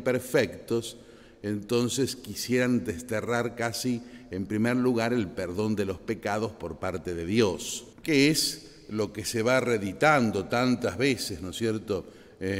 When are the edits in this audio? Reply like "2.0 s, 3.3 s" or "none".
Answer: 7.9 s